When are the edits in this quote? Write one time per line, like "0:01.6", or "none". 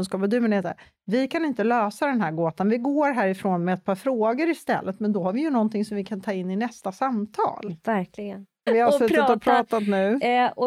0:08.7

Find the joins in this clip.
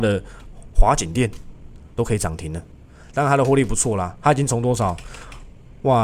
none

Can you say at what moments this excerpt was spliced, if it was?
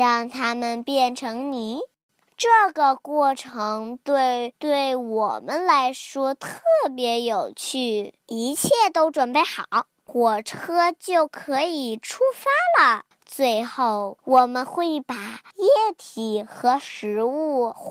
0:08.2
0:13.1

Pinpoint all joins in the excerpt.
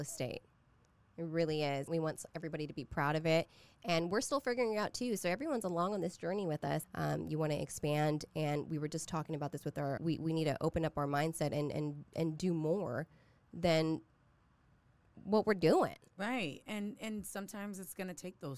0:01.9
0:06.8
0:10.0

